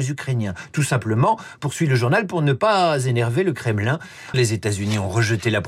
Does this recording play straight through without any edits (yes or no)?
no